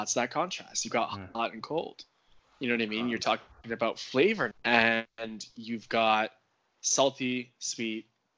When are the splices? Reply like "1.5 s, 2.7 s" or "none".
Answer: 4.5 s